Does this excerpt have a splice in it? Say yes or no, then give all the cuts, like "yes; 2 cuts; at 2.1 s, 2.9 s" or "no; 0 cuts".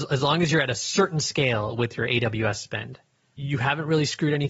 yes; 1 cut; at 3.3 s